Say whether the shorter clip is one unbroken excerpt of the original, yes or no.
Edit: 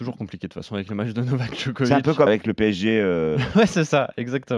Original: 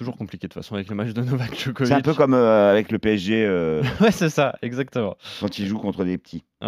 no